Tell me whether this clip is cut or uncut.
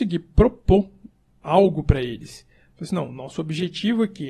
uncut